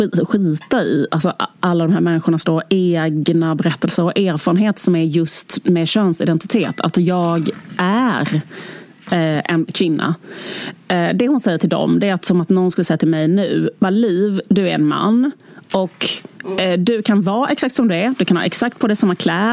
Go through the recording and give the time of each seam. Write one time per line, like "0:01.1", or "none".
0:09.7